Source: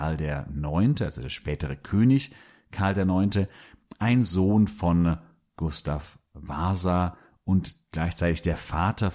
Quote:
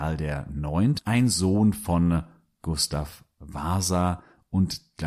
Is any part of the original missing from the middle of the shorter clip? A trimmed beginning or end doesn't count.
yes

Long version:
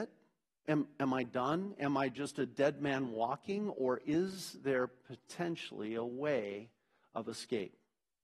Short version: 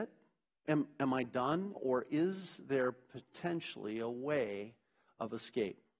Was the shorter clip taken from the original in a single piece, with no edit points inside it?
no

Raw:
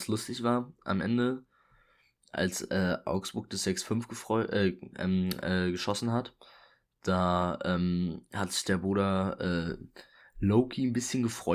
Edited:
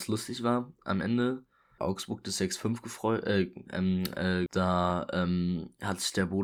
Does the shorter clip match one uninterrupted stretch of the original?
no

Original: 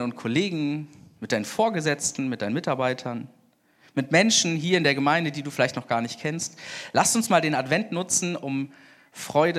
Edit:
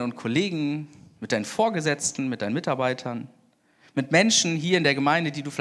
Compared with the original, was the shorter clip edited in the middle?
no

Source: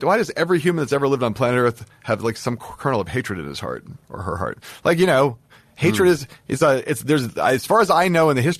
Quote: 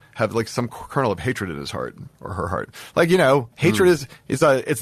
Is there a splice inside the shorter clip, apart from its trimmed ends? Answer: yes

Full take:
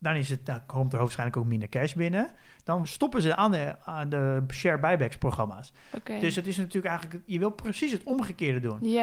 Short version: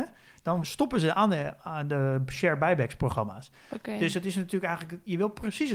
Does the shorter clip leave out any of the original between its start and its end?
no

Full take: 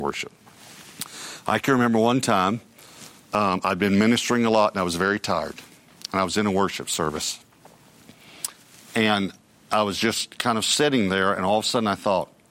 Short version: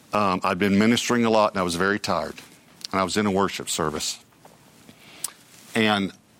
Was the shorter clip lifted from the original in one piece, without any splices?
yes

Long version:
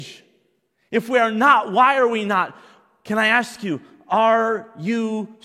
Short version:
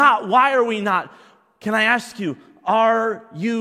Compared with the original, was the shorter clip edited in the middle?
no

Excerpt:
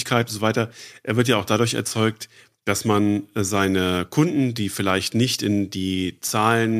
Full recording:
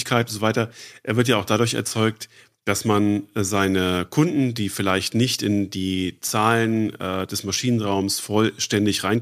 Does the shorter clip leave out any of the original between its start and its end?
no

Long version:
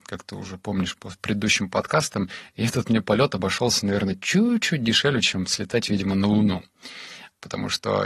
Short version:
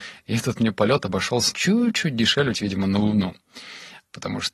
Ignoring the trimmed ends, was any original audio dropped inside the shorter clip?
yes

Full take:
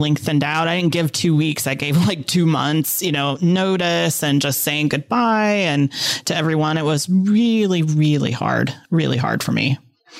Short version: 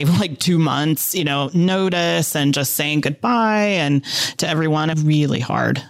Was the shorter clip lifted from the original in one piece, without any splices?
no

